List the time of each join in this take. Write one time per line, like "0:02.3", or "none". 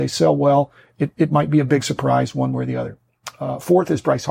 none